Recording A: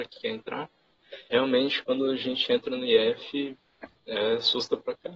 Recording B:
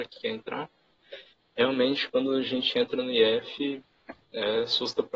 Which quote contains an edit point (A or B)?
A